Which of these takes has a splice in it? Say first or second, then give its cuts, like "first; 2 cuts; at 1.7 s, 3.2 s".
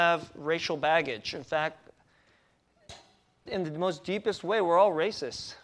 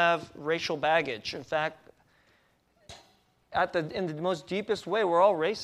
first; 1 cut; at 3.5 s